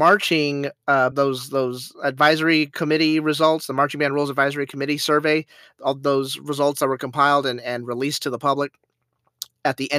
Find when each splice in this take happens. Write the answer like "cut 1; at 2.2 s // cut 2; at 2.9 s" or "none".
cut 1; at 1.1 s